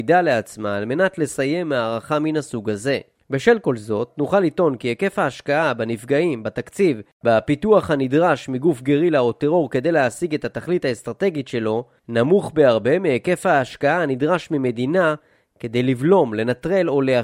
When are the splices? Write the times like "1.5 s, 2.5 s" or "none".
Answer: none